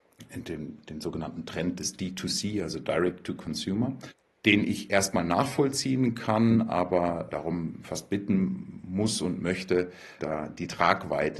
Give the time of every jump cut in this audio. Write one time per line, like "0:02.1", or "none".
0:07.3
0:10.2